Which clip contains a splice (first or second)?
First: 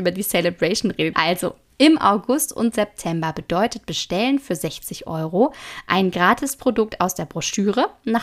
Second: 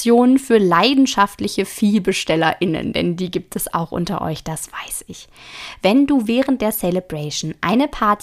first